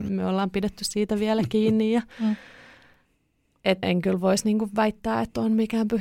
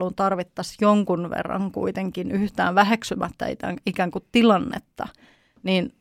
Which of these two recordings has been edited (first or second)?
first